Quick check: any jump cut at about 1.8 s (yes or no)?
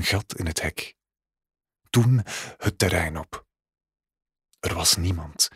no